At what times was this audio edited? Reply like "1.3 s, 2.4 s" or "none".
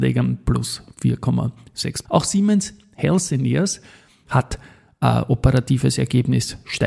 2.0 s, 4.3 s